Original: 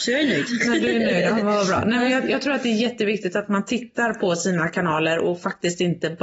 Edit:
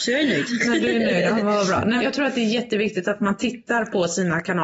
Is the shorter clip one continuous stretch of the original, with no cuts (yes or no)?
no